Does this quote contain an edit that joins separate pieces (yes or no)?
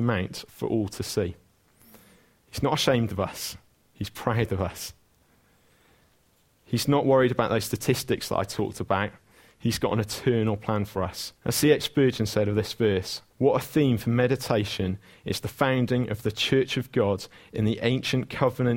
yes